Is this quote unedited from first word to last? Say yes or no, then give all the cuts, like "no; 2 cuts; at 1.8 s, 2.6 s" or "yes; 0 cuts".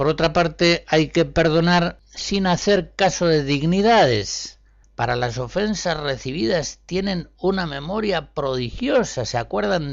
no; 1 cut; at 4.8 s